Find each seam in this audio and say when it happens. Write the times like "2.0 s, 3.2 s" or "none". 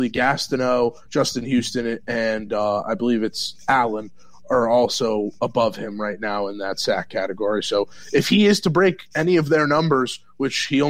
none